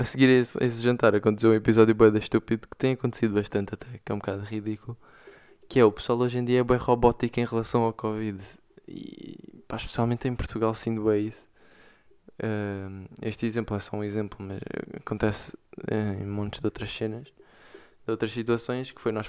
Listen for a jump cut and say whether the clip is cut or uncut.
uncut